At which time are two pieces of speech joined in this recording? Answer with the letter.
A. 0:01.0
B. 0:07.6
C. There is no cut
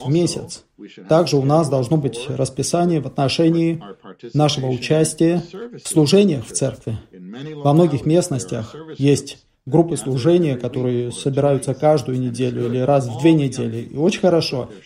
C